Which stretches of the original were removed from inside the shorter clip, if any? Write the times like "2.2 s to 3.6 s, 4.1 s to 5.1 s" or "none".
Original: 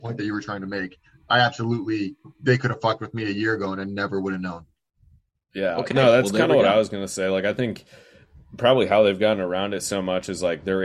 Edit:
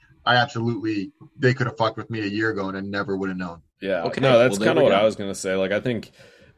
4.7 s to 5.4 s